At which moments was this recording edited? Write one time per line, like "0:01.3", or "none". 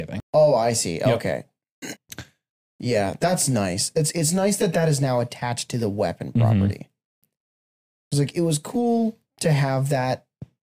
0:02.0